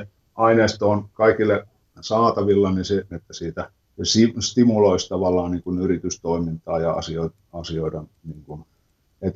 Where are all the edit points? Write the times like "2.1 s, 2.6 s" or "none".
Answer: 3.1 s